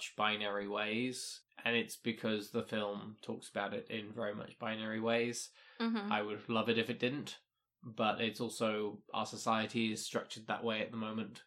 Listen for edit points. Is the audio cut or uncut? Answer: uncut